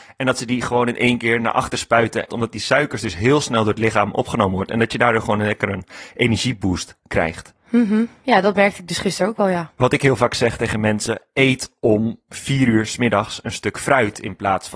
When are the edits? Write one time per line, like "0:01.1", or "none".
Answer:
0:02.3